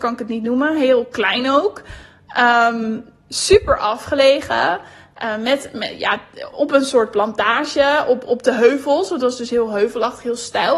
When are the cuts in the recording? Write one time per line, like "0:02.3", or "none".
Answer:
0:06.5